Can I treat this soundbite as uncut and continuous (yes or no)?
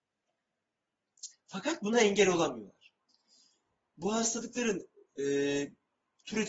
no